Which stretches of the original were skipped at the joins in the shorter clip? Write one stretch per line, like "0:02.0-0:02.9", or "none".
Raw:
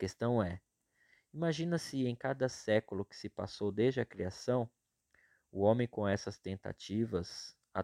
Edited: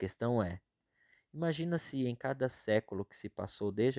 none

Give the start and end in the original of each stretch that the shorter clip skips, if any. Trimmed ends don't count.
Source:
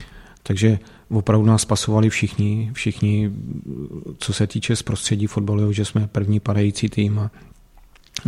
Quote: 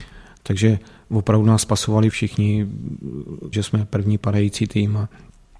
0:02.1-0:02.7
0:04.2-0:05.7

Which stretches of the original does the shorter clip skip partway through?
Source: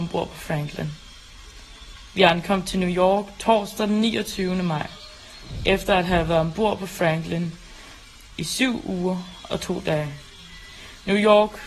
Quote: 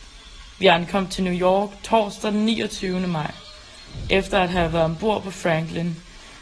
none

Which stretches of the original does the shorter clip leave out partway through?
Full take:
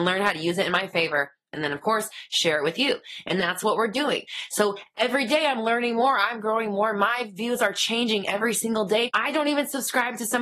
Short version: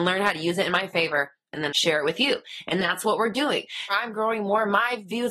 0:01.7-0:02.3
0:04.5-0:06.2

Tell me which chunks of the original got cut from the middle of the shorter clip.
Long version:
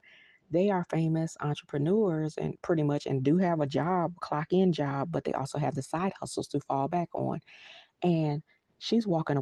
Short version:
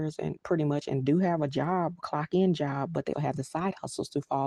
0:05.3-0:05.5

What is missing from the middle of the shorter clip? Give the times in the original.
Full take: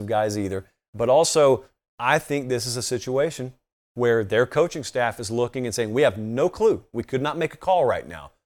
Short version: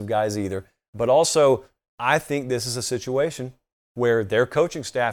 none

